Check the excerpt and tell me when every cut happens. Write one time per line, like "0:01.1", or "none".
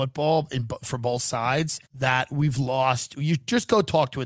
0:01.8